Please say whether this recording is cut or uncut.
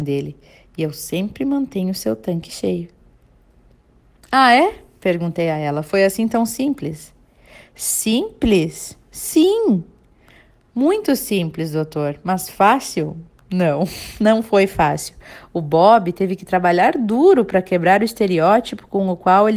uncut